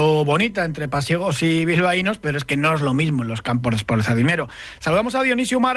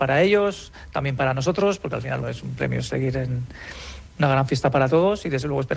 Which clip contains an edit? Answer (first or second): second